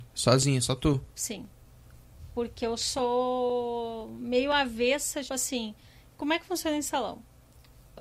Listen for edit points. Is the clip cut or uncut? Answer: cut